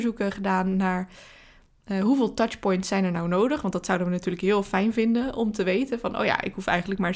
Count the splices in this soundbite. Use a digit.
0